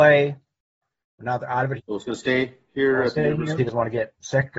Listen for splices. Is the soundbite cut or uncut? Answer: cut